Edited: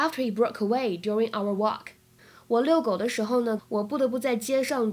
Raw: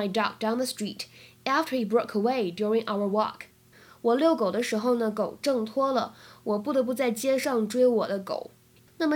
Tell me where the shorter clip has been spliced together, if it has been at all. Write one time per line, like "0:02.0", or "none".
0:03.6